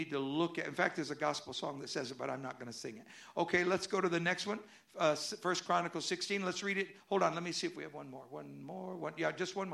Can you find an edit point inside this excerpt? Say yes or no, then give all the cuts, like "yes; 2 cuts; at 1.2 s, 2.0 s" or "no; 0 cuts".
no; 0 cuts